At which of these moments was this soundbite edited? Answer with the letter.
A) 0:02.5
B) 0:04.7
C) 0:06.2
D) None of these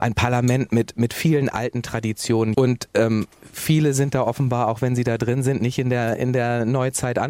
A